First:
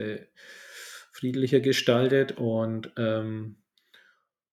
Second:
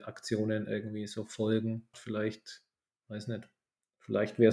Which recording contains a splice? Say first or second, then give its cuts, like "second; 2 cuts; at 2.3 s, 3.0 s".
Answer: second; 1 cut; at 1.9 s